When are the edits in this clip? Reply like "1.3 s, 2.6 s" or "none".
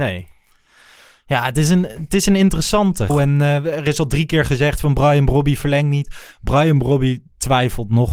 3.1 s